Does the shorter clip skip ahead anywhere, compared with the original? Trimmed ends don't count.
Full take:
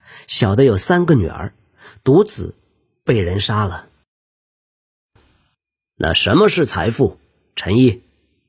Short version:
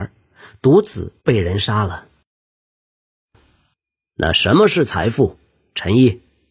yes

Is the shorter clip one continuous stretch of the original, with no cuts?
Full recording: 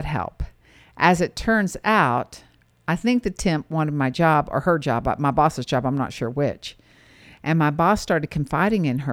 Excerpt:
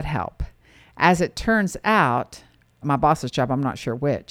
no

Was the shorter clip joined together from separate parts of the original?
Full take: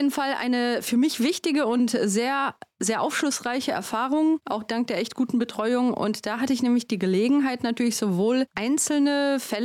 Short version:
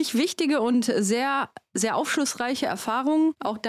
no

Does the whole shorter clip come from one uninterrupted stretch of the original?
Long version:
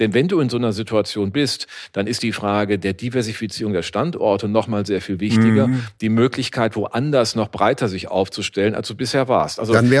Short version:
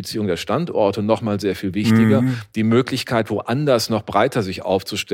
yes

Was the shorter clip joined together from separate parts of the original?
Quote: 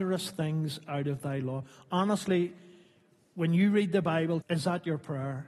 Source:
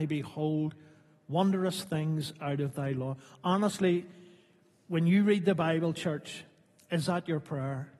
yes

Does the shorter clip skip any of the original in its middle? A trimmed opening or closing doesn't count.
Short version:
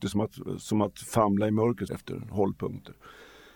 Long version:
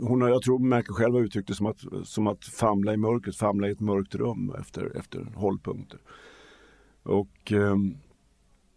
yes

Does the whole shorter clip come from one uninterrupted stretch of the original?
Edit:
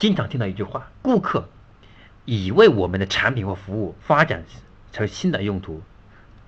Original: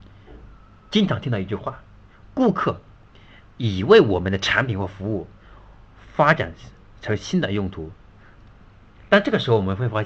no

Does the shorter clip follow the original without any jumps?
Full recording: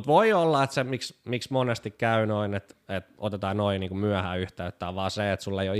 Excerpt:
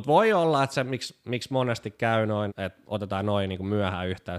no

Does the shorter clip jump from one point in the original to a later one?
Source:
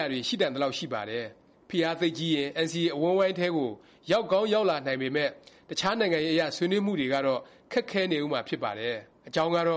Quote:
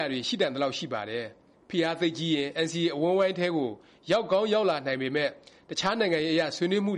no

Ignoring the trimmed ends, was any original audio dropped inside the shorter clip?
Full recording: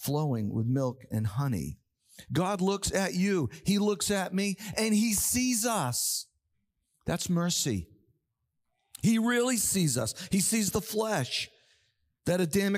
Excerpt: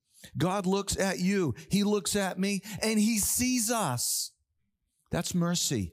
no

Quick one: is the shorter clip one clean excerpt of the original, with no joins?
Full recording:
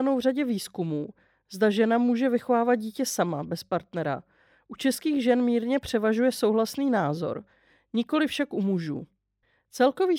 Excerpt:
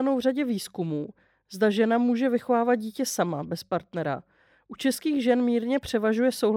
yes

